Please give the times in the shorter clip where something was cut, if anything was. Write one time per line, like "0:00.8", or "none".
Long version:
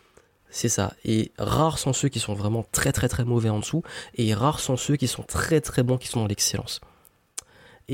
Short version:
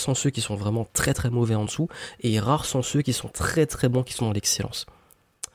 0:01.1